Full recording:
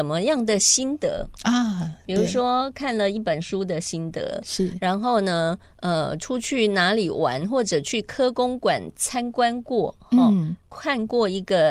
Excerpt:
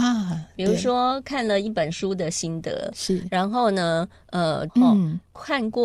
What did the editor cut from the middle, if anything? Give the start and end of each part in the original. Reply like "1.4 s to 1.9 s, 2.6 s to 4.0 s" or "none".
6.2 s to 10.1 s